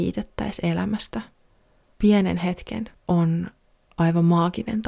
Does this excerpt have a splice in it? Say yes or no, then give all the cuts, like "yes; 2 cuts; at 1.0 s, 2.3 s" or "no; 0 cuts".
yes; 1 cut; at 2.9 s